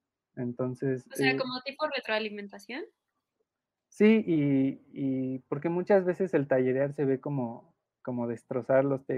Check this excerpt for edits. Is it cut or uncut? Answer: uncut